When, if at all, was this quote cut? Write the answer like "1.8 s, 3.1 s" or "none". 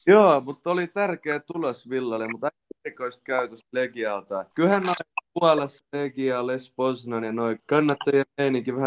4.5 s, 7.6 s